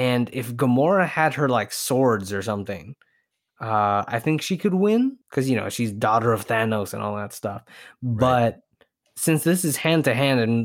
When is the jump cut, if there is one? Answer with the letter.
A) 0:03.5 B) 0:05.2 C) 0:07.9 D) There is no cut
B